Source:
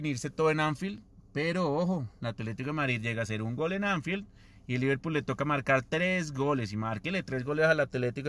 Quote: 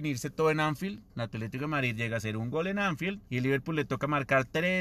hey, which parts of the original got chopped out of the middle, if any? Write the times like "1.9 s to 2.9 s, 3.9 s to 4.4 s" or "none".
1.1 s to 2.1 s, 4.3 s to 4.6 s